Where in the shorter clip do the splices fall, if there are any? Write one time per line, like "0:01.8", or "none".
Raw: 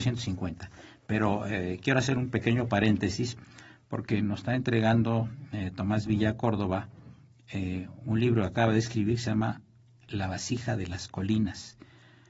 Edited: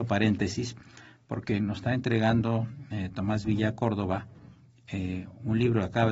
none